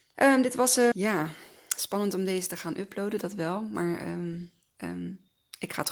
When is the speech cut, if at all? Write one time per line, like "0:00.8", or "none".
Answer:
0:00.9